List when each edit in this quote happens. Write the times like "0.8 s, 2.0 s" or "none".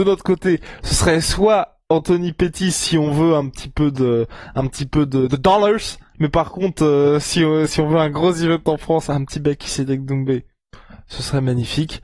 none